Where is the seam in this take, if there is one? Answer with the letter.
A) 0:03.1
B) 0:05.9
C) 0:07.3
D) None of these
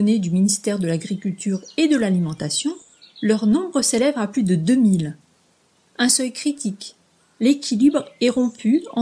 D